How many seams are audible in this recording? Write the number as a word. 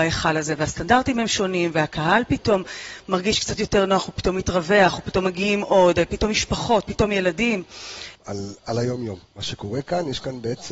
one